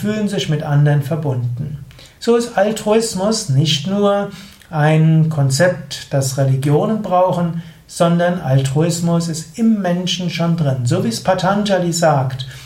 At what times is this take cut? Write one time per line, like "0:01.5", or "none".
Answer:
none

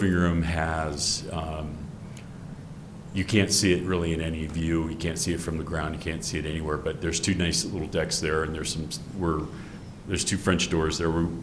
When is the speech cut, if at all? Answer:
none

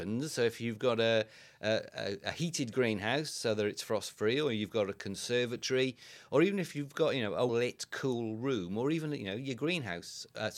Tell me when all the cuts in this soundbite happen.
0:07.5

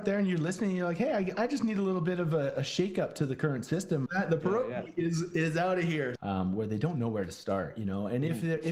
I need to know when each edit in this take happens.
0:04.1
0:06.2

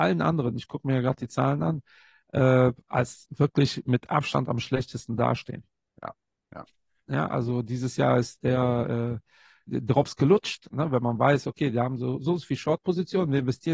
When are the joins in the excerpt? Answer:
0:07.0
0:09.7
0:10.7

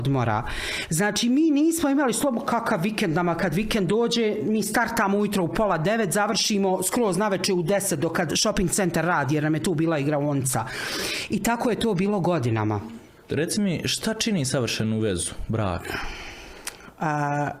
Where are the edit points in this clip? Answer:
0:08.3
0:13.3

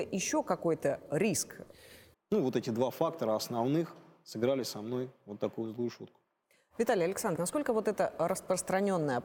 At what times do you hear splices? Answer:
0:02.1
0:07.4

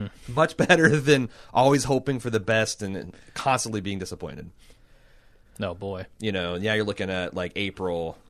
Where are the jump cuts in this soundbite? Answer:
0:05.4

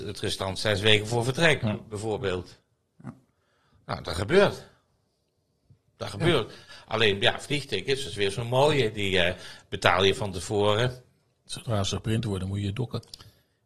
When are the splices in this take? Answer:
none

